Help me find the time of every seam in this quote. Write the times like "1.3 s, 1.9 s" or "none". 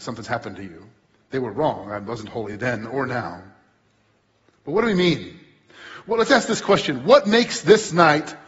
none